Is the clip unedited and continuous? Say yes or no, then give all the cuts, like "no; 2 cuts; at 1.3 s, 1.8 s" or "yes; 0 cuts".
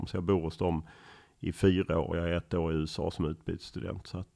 yes; 0 cuts